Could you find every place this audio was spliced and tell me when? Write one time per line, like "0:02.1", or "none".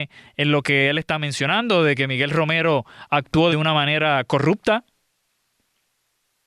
0:03.5